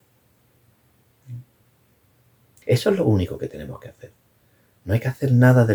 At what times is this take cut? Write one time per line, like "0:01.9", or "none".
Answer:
0:02.6